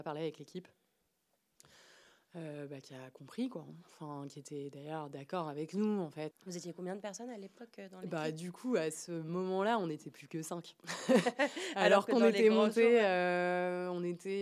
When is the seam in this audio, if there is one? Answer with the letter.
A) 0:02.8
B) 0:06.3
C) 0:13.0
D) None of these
B